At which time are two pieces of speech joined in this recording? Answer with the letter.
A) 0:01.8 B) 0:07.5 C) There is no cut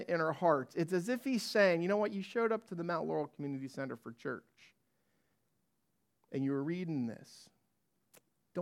C